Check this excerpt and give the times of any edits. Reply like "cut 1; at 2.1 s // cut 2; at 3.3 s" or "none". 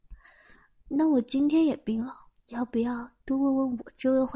cut 1; at 2.4 s